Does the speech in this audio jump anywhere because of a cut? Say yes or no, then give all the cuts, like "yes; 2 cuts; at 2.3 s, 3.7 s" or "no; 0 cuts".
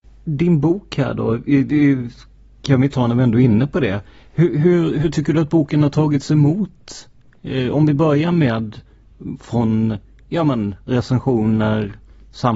no; 0 cuts